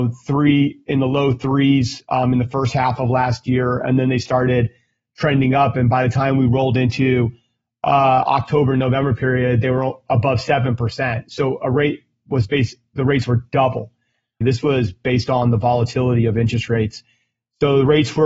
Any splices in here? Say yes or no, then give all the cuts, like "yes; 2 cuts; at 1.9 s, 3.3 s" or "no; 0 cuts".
yes; 1 cut; at 14.4 s